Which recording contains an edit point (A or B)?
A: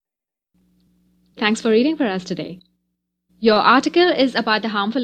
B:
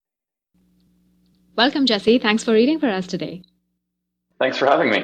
A